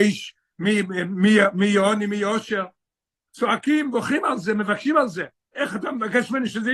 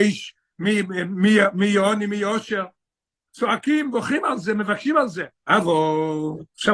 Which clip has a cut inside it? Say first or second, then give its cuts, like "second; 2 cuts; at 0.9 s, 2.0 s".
second; 1 cut; at 5.4 s